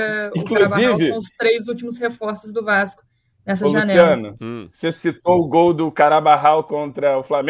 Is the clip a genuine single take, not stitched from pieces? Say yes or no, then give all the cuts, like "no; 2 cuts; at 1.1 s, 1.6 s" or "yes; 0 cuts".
yes; 0 cuts